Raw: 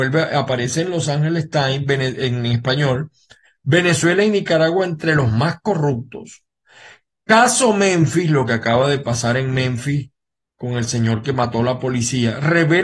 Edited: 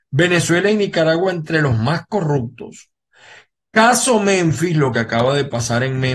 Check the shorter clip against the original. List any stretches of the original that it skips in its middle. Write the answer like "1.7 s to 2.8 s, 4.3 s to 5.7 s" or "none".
none